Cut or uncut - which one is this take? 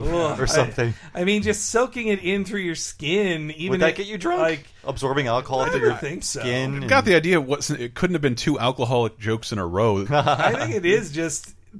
cut